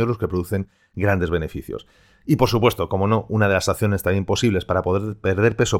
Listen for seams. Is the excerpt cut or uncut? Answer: uncut